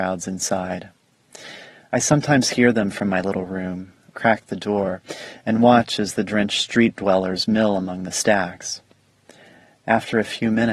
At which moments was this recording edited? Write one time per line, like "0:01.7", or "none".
0:04.1